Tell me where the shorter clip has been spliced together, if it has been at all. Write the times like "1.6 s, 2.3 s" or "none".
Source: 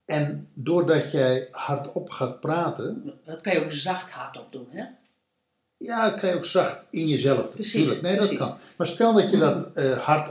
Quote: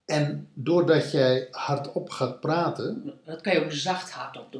none